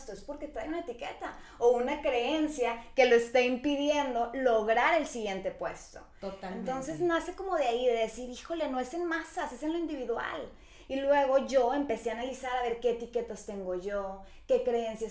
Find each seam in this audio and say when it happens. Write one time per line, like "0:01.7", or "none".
none